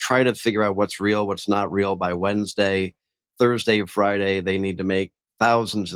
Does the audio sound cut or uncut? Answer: uncut